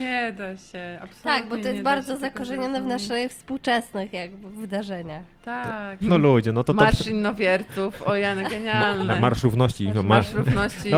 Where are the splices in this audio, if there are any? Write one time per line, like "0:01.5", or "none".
0:06.0